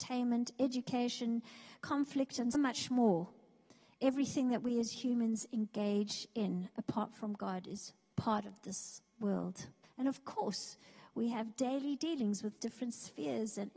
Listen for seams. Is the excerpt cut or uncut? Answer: cut